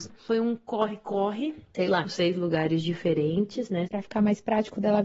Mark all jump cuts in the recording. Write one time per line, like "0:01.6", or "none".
0:02.0
0:03.9